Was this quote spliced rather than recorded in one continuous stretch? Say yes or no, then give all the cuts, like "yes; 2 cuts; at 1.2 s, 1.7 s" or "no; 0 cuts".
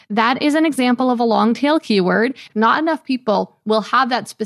yes; 1 cut; at 2.5 s